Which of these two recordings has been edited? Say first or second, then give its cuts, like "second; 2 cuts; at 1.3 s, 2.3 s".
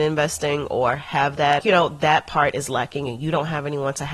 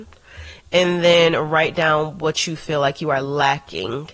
first; 1 cut; at 1.6 s